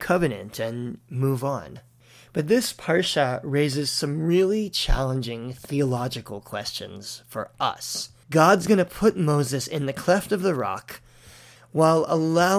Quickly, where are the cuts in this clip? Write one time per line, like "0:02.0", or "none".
0:08.2
0:11.6